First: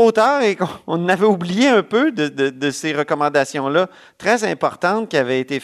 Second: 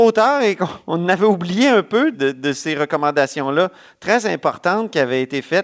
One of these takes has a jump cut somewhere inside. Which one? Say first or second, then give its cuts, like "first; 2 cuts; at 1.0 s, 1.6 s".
second; 1 cut; at 2.1 s